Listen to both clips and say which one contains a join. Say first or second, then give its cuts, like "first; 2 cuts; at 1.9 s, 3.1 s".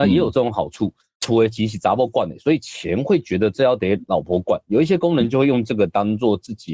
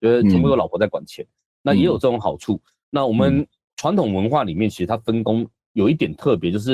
first; 1 cut; at 1.1 s